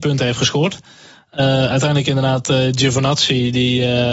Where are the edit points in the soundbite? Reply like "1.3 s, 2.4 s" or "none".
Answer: none